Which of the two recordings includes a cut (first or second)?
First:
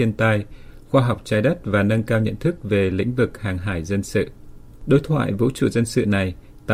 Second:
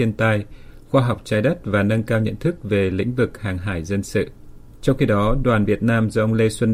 second